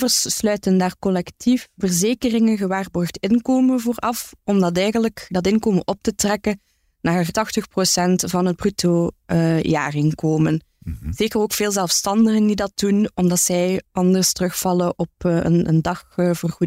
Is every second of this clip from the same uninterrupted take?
yes; 0 cuts

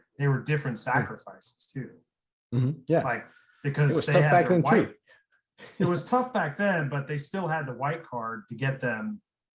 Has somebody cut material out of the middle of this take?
no; 0 cuts

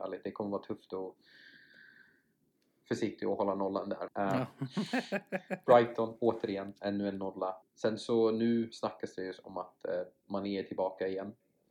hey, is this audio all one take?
no; 2 cuts; at 4.1 s, 7.6 s

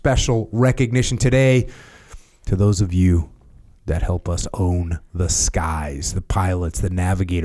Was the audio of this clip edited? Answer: no; 0 cuts

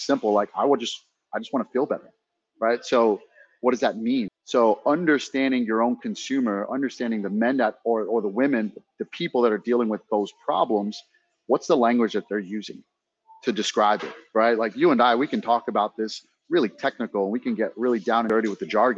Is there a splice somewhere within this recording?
yes; 1 cut; at 4.3 s

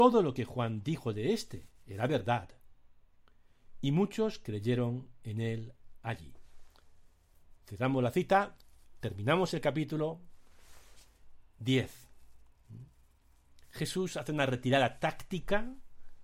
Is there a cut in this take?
no; 0 cuts

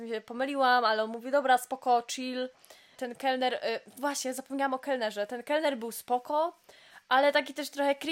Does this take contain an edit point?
yes; 1 cut; at 3.0 s

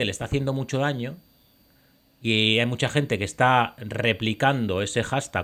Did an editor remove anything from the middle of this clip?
no; 0 cuts

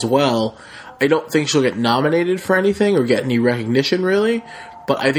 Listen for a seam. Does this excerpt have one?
no; 0 cuts

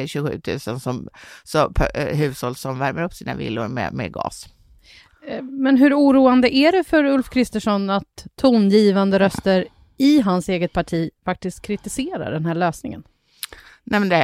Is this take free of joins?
no; 1 cut; at 2.6 s

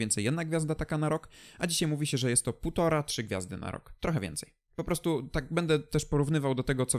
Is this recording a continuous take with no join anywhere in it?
yes; 0 cuts

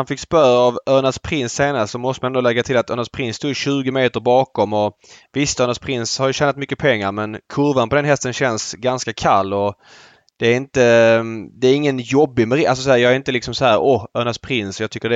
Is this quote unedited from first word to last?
yes; 0 cuts

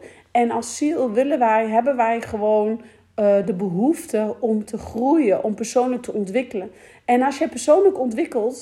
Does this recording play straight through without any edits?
yes; 0 cuts

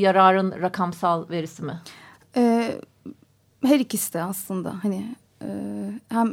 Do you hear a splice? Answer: no; 0 cuts

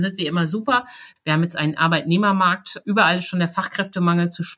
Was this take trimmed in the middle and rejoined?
yes; 1 cut; at 1.2 s

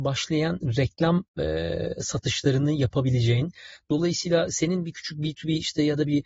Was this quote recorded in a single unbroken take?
yes; 0 cuts

